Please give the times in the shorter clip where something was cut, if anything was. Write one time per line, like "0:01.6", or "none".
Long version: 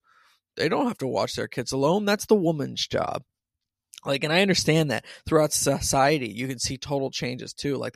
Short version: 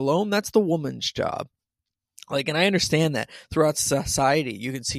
none